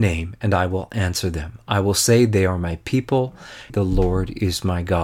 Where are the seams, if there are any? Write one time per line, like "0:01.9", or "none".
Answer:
0:03.7

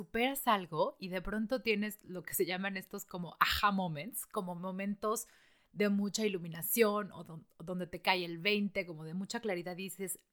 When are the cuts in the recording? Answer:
none

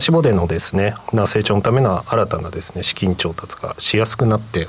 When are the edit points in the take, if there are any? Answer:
0:01.0

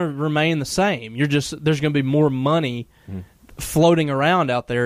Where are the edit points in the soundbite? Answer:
none

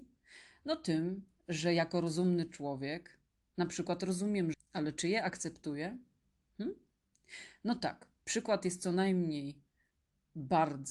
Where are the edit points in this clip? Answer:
0:04.5

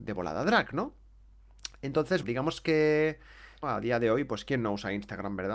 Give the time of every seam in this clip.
0:02.2
0:03.6

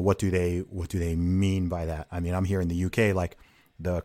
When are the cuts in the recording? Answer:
none

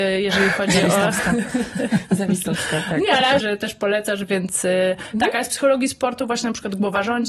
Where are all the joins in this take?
0:03.4

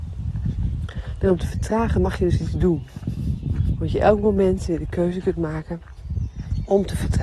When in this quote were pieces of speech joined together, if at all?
0:01.2
0:03.7

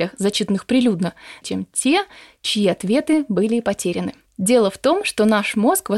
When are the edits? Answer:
0:01.4
0:04.3

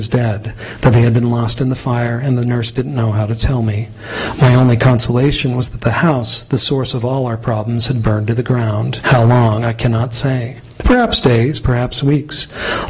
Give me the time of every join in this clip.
0:09.0

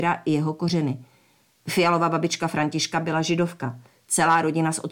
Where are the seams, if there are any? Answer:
none

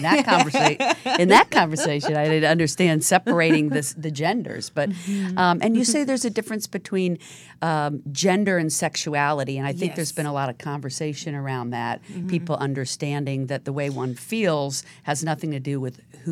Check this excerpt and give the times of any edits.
none

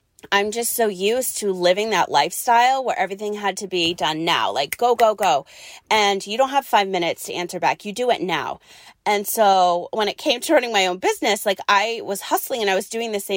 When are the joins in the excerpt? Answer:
none

